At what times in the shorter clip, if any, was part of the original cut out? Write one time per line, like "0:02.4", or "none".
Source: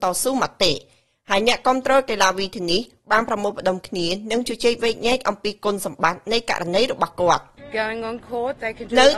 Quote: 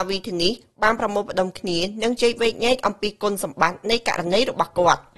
0:02.2

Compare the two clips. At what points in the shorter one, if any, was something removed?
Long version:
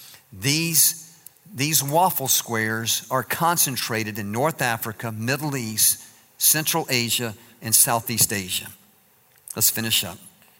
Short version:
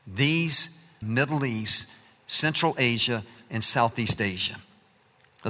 0:01.0

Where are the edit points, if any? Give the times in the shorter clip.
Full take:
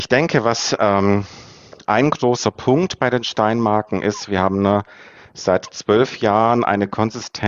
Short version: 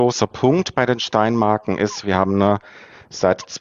none

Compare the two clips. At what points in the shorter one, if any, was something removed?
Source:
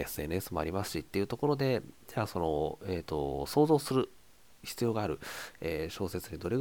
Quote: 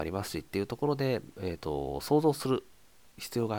0:01.4

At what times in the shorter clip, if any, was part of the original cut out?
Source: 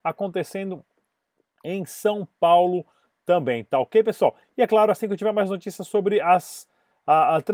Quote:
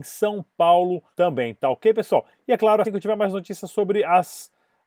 0:01.1
0:02.8

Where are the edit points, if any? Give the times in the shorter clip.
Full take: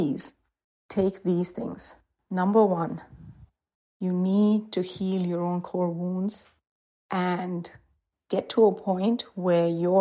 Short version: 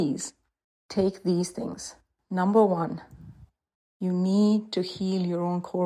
none

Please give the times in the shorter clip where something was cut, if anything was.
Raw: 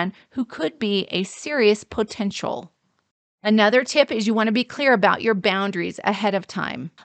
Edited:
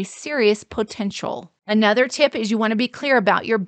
0:01.6

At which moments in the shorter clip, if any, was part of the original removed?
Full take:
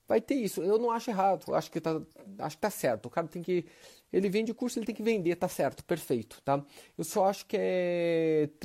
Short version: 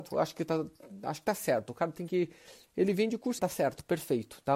0:03.4

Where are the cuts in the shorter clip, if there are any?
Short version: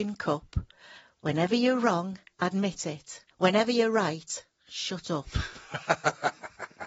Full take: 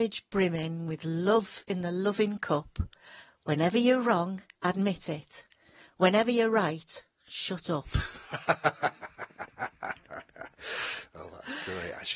0:03.3

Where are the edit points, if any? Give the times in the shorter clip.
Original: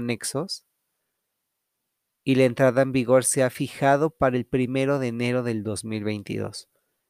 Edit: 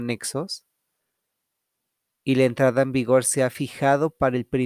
none

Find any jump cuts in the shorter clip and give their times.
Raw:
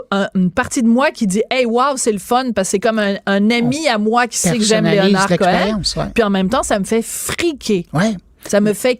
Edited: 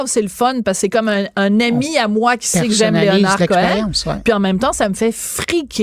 none

